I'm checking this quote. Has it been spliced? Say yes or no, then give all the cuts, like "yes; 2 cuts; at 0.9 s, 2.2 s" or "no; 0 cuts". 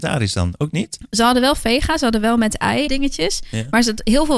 yes; 1 cut; at 2.9 s